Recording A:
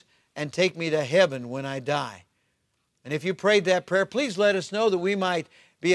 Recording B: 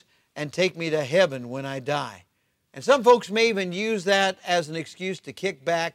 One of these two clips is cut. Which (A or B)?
B